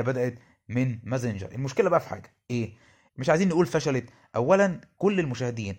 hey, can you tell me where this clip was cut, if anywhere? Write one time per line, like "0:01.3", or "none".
0:03.1